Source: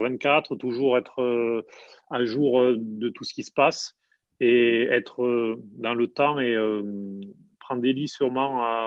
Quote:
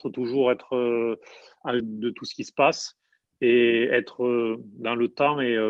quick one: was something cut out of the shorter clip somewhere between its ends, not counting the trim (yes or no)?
yes